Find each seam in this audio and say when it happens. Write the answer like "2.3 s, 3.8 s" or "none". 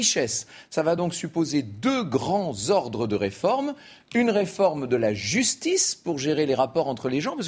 none